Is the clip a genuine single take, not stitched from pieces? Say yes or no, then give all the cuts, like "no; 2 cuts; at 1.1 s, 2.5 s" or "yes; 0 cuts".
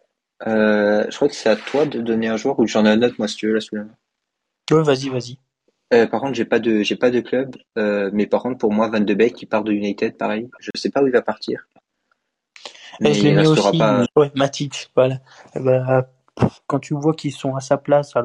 no; 1 cut; at 14.1 s